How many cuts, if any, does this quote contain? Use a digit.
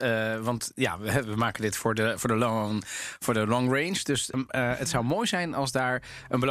1